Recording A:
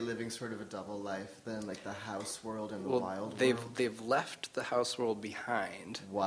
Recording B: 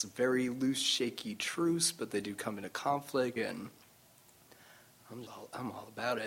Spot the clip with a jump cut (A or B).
B